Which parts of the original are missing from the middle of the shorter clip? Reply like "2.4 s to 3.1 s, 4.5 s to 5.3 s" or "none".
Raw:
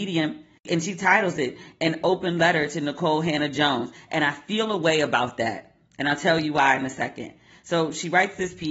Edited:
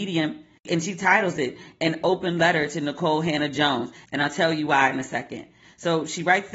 4.0 s to 5.9 s